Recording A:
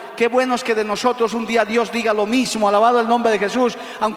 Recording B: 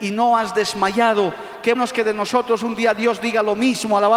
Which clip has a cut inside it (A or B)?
B